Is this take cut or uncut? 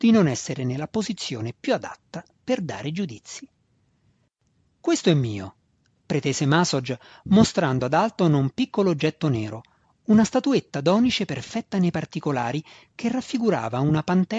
uncut